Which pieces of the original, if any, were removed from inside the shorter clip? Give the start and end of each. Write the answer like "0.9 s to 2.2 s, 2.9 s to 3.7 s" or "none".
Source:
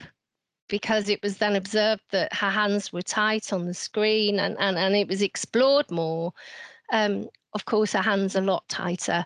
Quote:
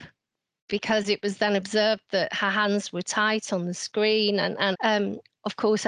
4.7 s to 6.8 s